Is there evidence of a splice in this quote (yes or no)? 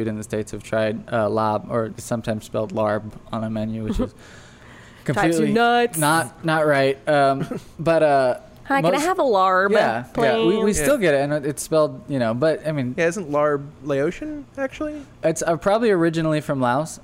no